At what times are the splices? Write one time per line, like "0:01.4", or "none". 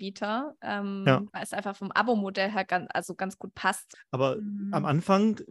0:03.9